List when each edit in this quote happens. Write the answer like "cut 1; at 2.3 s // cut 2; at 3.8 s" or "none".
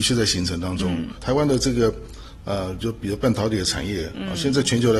cut 1; at 1.1 s